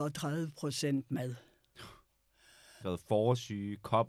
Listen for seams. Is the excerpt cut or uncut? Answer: cut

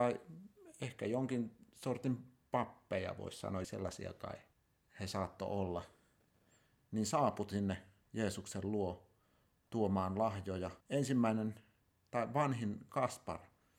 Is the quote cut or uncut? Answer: cut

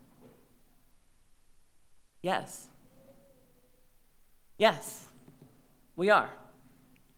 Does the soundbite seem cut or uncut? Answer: uncut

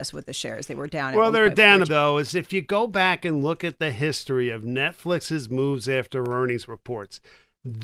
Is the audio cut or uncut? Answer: cut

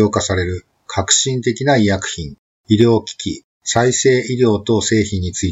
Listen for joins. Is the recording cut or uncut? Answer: uncut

